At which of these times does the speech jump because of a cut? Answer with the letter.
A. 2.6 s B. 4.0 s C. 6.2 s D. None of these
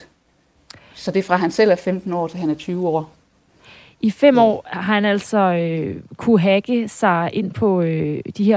D